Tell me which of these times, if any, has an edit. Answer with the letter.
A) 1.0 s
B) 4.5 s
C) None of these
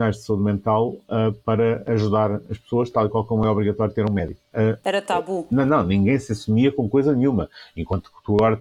B